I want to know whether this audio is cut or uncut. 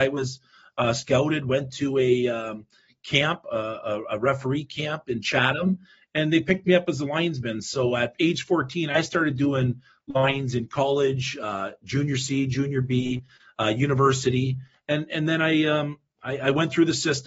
uncut